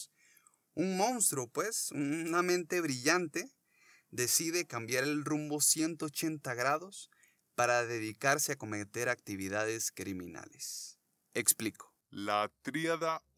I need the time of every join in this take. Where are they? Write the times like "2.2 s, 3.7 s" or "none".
none